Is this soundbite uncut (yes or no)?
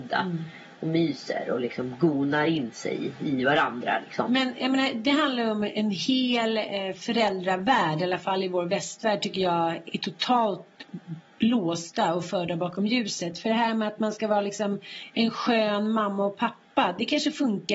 yes